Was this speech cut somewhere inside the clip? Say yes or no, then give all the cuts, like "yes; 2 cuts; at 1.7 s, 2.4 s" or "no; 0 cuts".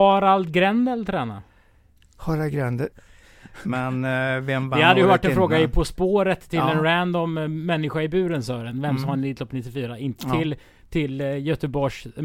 yes; 1 cut; at 2.9 s